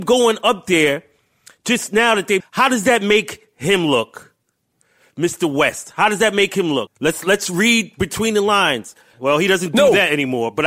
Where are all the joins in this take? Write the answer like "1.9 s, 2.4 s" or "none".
2.4 s, 6.9 s, 9.1 s